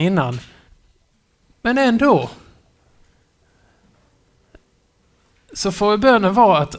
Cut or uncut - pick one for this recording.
uncut